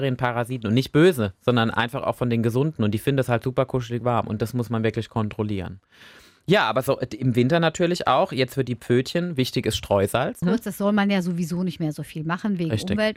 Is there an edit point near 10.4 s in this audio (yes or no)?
yes